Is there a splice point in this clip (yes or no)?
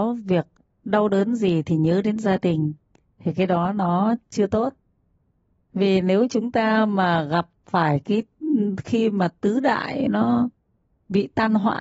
no